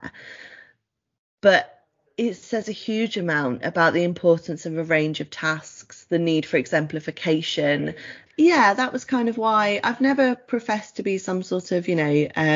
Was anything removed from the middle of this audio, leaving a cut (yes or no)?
yes